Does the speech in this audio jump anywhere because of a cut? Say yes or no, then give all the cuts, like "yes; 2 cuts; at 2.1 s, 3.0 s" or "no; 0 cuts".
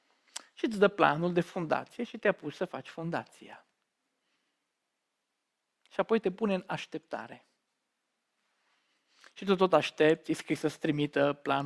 no; 0 cuts